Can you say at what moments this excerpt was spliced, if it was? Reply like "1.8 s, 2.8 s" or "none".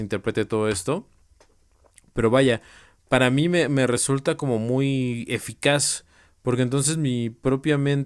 none

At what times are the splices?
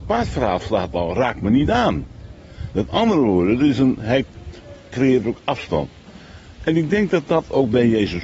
none

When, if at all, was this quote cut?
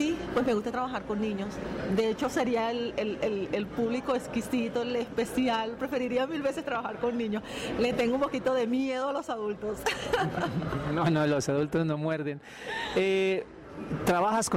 none

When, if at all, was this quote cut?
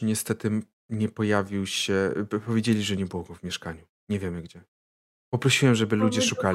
none

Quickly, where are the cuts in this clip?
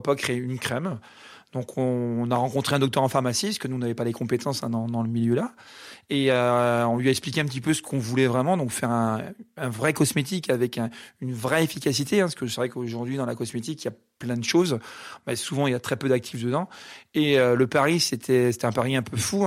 none

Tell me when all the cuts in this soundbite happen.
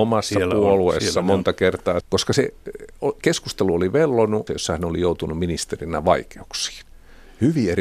2.0 s, 4.5 s

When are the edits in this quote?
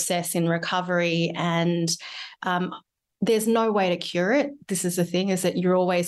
none

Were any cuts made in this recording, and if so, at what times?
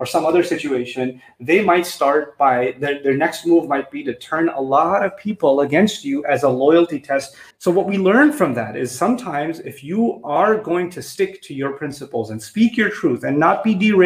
7.5 s

